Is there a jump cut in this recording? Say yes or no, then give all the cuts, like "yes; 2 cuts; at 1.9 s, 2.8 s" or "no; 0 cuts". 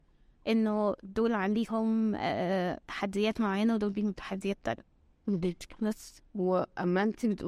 yes; 1 cut; at 6.3 s